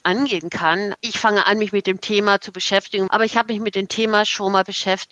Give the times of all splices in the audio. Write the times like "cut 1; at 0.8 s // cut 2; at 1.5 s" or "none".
cut 1; at 1.0 s // cut 2; at 3.1 s